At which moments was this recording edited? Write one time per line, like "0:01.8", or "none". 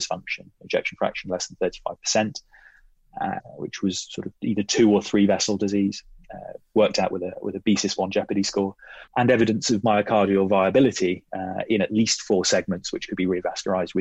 0:03.4
0:09.1